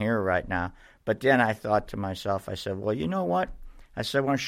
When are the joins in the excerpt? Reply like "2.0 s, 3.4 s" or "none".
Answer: none